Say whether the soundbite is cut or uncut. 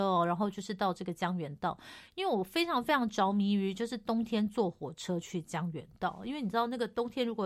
uncut